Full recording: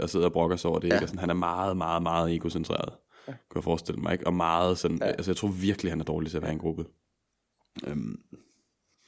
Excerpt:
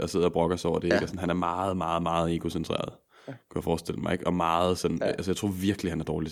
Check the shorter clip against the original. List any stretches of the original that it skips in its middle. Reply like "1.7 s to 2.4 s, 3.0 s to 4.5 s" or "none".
none